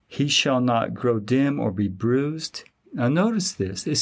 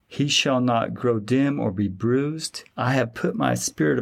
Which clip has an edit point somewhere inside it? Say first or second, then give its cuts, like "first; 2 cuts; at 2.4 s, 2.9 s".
second; 1 cut; at 2.7 s